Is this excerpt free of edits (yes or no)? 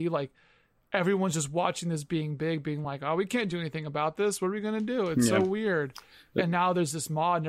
yes